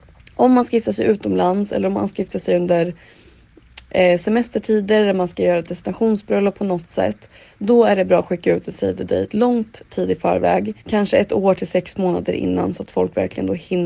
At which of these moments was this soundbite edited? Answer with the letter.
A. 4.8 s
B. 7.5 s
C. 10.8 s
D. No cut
C